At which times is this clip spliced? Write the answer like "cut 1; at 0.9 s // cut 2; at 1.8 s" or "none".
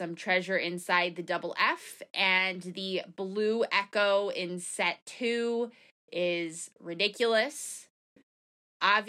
none